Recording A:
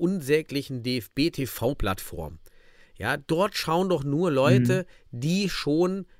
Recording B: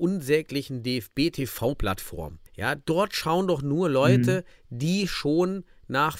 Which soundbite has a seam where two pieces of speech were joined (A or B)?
B